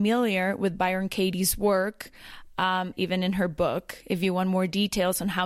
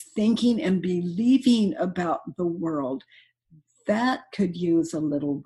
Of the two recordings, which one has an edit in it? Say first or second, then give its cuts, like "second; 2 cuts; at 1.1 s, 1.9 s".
first; 1 cut; at 2.9 s